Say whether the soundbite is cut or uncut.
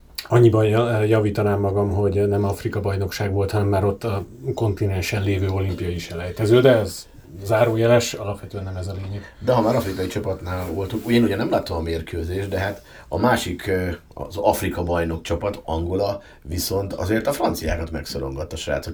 uncut